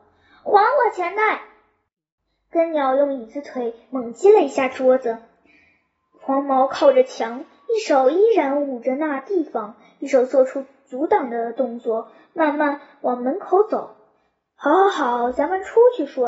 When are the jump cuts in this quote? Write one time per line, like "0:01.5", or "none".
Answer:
none